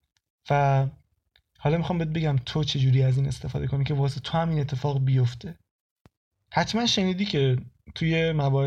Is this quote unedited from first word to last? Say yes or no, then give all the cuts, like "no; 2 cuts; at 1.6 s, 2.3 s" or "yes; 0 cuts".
yes; 0 cuts